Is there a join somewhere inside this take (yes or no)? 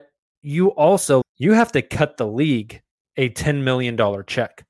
yes